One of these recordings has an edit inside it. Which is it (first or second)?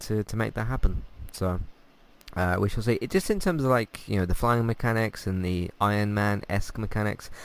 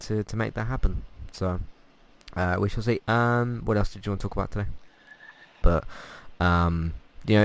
second